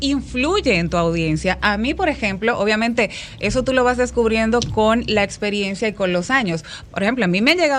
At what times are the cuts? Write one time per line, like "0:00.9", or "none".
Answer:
none